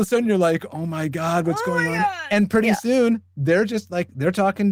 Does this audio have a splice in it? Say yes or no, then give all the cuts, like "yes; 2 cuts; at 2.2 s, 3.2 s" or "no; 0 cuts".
no; 0 cuts